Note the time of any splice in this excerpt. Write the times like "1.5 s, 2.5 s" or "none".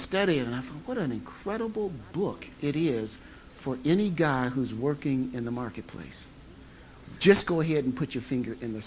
7.2 s

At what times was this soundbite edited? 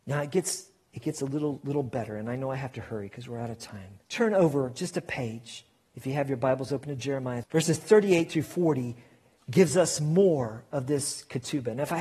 4.0 s, 7.4 s

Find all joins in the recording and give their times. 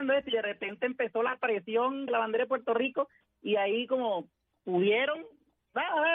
2.1 s

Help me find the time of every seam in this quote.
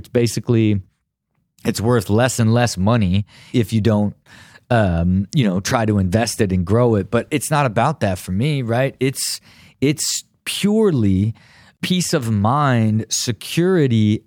3.5 s

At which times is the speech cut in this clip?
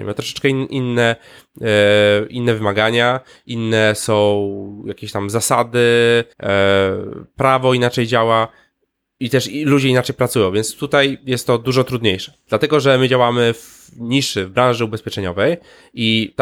6.3 s, 12.5 s

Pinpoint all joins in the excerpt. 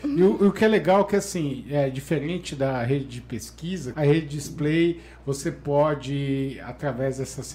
3.9 s

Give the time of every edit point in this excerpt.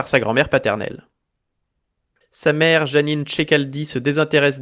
2.2 s

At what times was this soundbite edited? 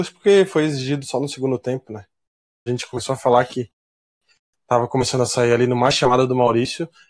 2.7 s

